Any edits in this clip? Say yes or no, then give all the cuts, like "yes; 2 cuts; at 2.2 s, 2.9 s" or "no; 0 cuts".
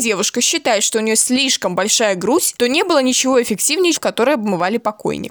yes; 1 cut; at 3.9 s